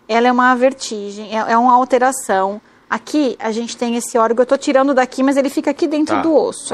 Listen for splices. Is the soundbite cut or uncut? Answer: uncut